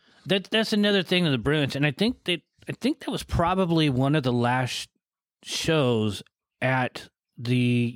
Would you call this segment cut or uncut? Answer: uncut